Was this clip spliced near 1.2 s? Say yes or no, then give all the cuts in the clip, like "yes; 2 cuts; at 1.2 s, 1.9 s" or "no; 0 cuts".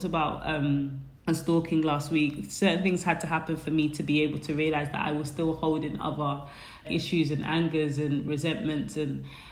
yes; 2 cuts; at 1.2 s, 6.8 s